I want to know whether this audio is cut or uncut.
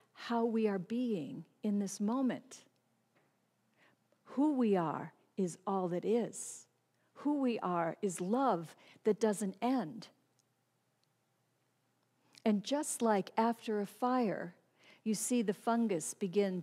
uncut